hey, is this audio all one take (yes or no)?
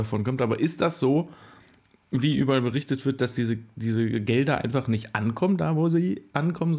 yes